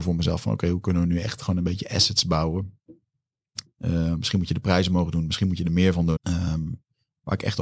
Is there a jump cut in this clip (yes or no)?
yes